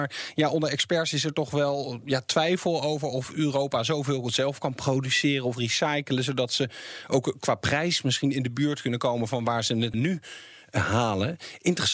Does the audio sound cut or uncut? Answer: cut